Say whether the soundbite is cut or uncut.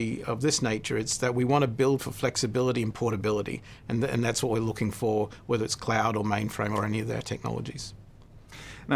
uncut